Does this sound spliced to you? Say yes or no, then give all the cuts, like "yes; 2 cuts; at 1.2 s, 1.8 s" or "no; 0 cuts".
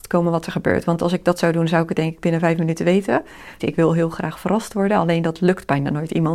yes; 1 cut; at 3.6 s